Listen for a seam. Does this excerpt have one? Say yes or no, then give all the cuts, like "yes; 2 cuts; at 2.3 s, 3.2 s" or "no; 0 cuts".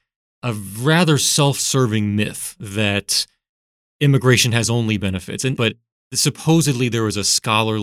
yes; 1 cut; at 5.5 s